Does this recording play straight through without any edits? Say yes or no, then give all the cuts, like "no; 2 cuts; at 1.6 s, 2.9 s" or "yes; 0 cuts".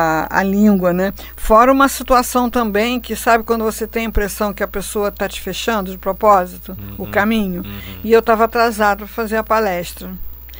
yes; 0 cuts